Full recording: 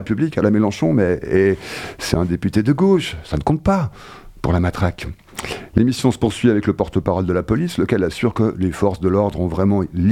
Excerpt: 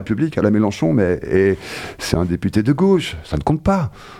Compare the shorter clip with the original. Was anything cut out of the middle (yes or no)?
no